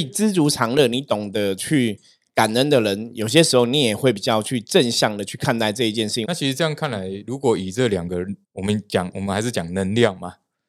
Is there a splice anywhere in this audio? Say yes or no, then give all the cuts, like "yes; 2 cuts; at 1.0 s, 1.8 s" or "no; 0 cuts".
yes; 2 cuts; at 6.2 s, 8.4 s